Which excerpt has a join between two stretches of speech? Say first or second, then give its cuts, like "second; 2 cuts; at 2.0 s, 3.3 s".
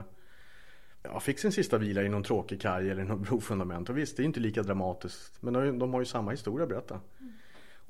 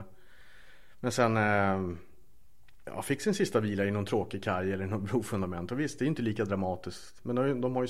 first; 1 cut; at 1.0 s